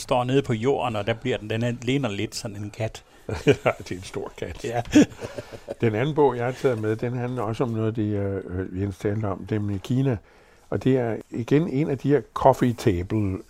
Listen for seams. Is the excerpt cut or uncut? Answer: uncut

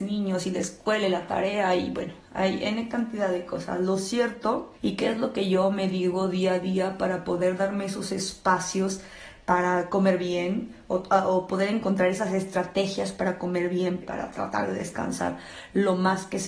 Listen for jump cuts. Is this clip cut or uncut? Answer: cut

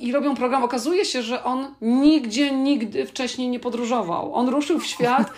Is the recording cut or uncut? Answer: uncut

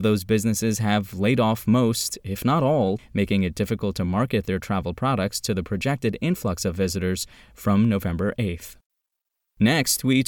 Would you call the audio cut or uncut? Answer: cut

